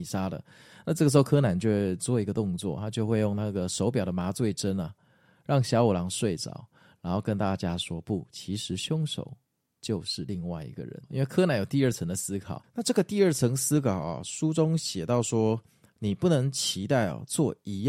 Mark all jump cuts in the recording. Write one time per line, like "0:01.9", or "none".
none